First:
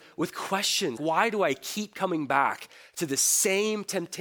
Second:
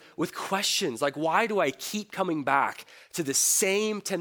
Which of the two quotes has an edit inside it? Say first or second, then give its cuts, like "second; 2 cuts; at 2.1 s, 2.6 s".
first; 1 cut; at 1.0 s